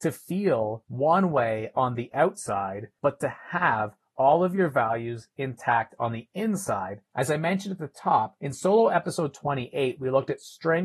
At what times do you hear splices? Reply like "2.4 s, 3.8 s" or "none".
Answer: 7.1 s

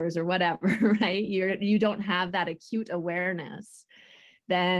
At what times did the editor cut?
none

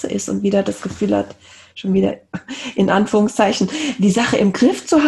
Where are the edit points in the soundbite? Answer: none

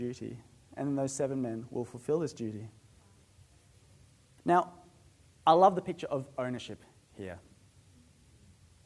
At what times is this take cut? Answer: 4.4 s

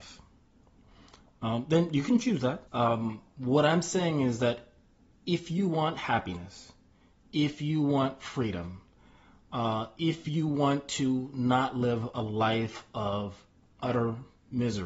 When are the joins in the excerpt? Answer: 2.7 s

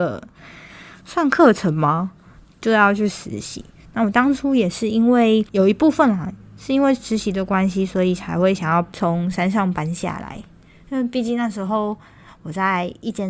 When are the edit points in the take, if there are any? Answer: none

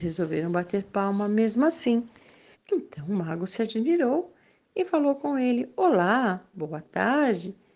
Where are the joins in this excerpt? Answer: 2.5 s

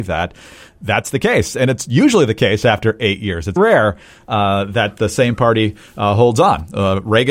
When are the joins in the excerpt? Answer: 3.6 s

